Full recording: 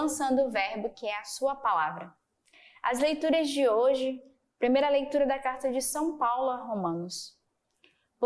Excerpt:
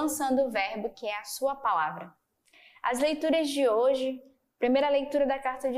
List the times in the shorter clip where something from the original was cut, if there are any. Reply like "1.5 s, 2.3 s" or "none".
none